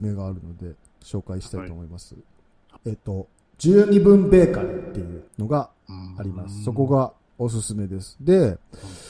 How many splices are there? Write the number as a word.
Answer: two